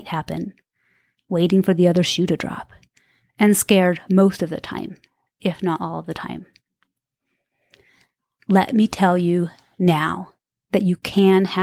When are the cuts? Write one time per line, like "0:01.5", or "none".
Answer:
none